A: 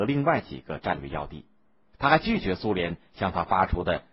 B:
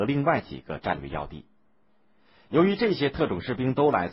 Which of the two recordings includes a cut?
A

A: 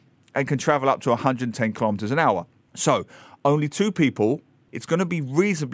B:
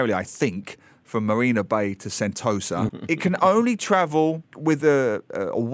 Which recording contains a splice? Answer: B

